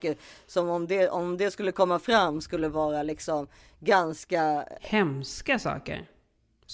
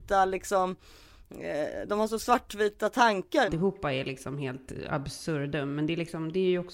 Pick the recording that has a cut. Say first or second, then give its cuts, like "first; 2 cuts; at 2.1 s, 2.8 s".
second; 1 cut; at 3.5 s